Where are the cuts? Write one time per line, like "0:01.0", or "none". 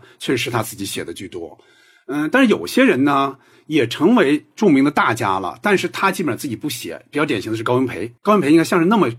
0:08.2

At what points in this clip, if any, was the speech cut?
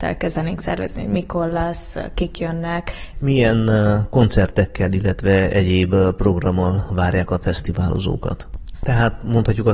0:03.1
0:08.7

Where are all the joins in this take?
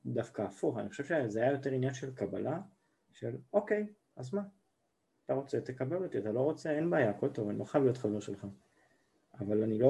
0:04.1

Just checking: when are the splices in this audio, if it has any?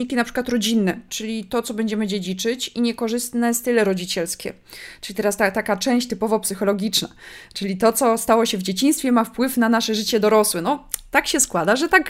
0:01.1

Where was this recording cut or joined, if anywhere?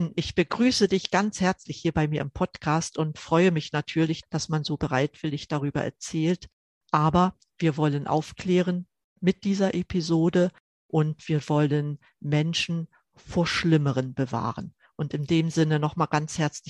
0:04.2

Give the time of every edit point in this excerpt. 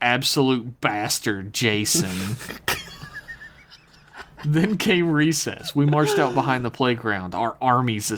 none

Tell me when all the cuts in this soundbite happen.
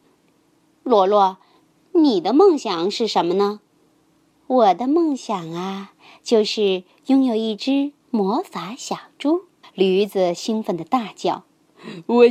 0:09.6

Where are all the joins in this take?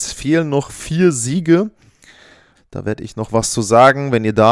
0:02.5

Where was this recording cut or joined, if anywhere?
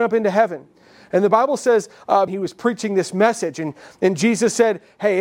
0:02.3

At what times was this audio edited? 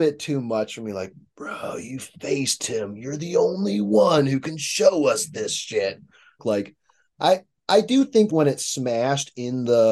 0:06.4
0:08.3

